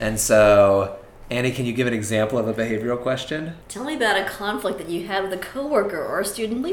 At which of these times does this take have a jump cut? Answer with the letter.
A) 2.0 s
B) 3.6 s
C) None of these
B